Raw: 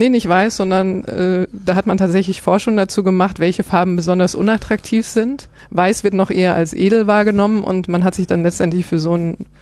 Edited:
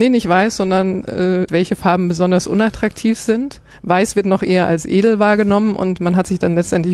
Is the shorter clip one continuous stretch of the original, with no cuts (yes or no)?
no